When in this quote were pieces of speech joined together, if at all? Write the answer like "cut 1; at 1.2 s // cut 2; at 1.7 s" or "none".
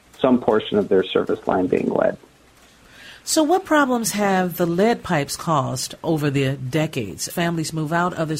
cut 1; at 7.3 s